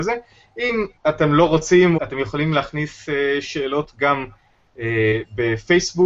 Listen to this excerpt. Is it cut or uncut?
cut